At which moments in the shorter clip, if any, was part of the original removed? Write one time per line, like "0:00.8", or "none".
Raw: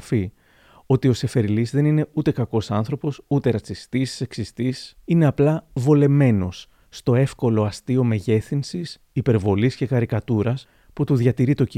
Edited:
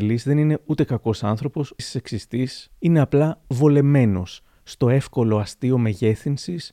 0:01.8